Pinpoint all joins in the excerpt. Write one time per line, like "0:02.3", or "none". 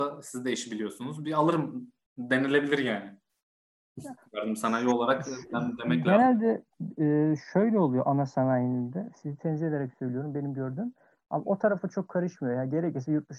none